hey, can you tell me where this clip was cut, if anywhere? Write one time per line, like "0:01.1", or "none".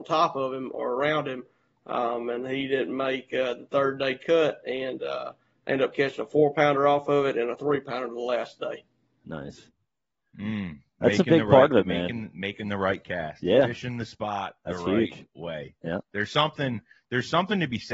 none